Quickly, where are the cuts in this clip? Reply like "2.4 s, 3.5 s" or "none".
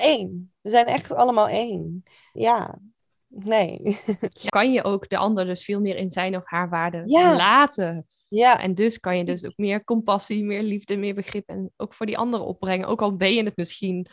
2.3 s, 4.5 s, 8.6 s